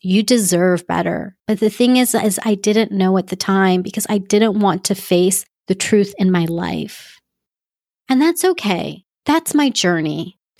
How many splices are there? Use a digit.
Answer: 1